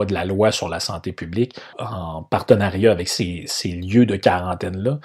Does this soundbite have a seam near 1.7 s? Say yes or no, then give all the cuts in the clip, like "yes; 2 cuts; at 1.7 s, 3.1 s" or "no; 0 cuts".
yes; 1 cut; at 1.7 s